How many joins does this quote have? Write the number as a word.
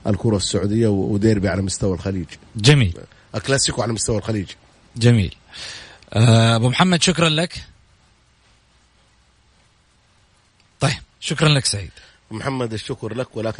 one